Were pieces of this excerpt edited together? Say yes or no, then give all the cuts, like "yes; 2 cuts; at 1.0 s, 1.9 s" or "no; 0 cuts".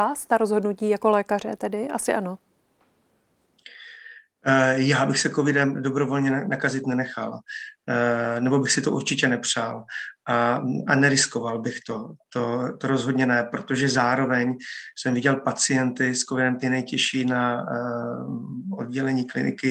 yes; 1 cut; at 16.6 s